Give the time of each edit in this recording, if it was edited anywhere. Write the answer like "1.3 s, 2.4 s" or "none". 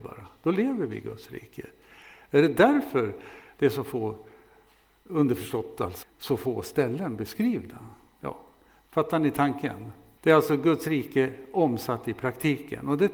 6.0 s, 10.2 s

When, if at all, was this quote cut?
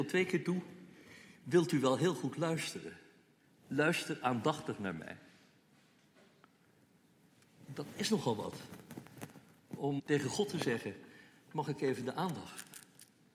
10.0 s

